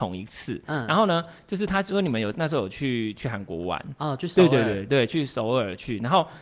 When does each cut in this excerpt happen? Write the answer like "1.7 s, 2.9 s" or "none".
none

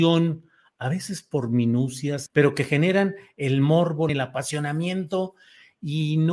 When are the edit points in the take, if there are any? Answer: 2.3 s, 4.1 s

